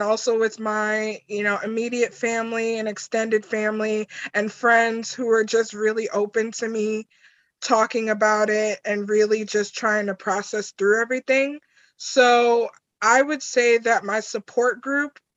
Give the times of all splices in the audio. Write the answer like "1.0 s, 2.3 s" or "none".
none